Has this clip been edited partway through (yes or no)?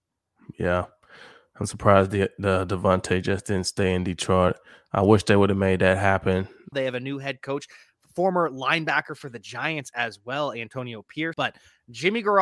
yes